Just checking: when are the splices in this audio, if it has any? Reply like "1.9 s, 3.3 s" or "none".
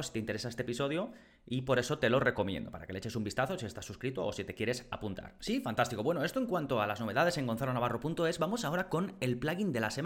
5.4 s